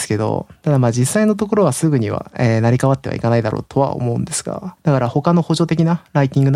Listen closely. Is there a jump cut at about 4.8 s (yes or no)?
yes